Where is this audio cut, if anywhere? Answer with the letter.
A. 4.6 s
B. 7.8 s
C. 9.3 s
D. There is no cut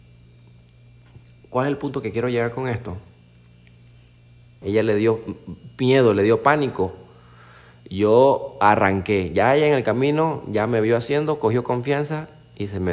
A